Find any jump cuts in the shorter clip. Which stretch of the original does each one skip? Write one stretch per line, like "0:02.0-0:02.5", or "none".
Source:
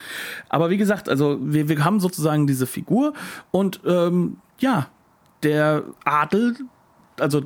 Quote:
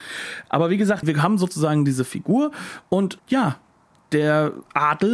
0:01.0-0:01.6
0:03.8-0:04.5